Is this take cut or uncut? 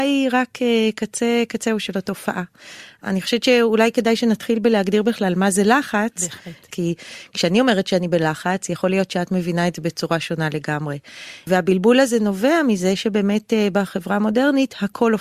uncut